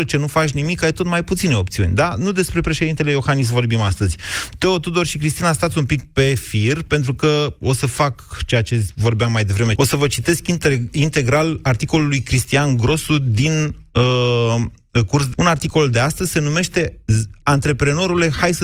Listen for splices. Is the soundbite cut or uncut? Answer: cut